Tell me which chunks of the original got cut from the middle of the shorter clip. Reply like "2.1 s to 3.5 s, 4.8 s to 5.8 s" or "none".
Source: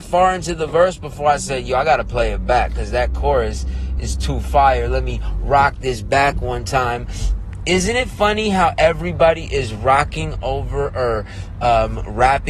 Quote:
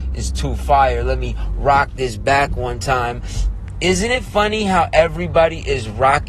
none